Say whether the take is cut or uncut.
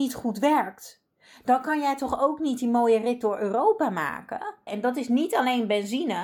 cut